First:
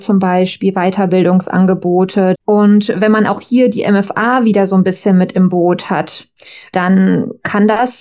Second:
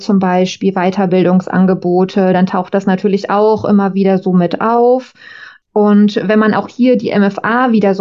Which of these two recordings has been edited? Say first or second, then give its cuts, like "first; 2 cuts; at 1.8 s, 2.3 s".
first; 1 cut; at 2.3 s